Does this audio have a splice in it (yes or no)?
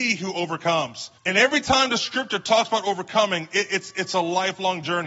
yes